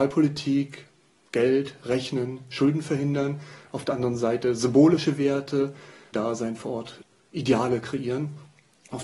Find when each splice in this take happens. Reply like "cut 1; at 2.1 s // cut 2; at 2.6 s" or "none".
cut 1; at 6.1 s